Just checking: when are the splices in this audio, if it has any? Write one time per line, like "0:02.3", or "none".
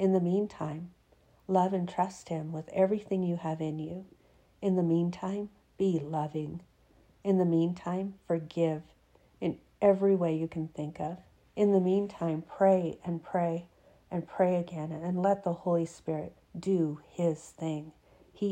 0:11.4
0:16.4